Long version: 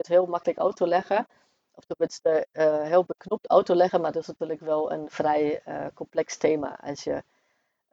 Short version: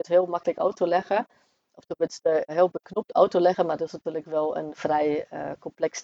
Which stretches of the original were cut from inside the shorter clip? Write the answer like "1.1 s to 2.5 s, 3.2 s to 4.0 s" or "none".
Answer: 2.5 s to 2.8 s